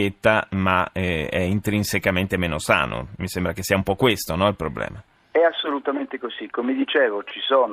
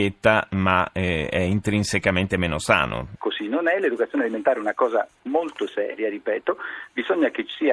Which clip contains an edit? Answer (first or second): second